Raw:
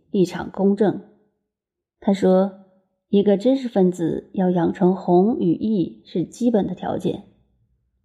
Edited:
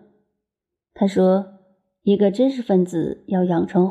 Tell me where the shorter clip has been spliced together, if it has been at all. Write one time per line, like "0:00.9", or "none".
none